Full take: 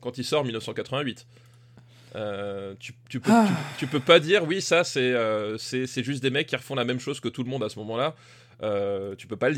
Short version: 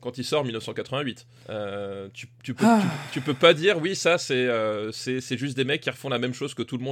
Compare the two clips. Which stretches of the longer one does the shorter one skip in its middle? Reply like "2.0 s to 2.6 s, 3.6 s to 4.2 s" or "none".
1.4 s to 2.0 s